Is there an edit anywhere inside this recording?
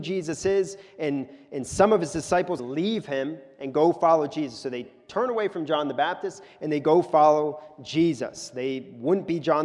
yes; 1 cut; at 2.6 s

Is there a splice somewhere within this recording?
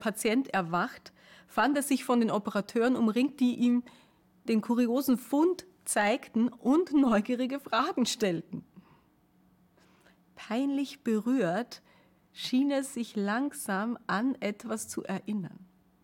no; 0 cuts

